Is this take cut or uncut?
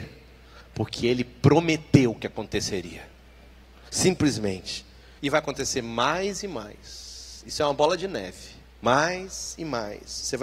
cut